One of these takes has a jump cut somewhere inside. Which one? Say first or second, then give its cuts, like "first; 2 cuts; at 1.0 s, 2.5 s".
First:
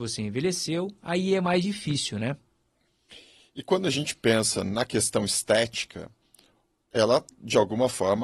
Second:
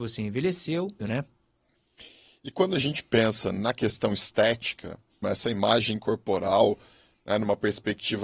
second; 2 cuts; at 1.0 s, 5.2 s